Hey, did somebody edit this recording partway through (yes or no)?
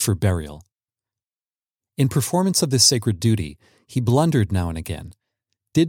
no